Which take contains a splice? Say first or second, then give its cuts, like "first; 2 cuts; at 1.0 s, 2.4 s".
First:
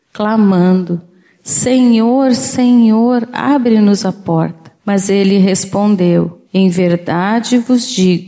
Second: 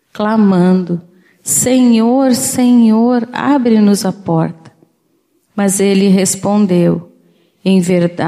first; 2 cuts; at 4.8 s, 6.4 s